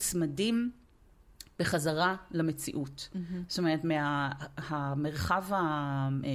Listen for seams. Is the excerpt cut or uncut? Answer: uncut